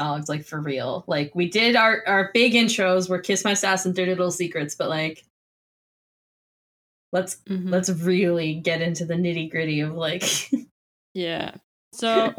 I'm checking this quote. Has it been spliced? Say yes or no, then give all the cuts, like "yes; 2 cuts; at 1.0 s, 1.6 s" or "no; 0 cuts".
no; 0 cuts